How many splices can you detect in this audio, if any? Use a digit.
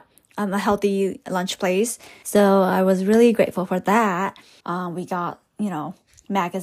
2